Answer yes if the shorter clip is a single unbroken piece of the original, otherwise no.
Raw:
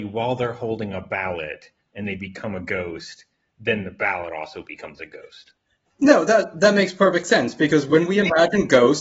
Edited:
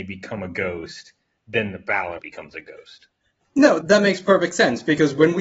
no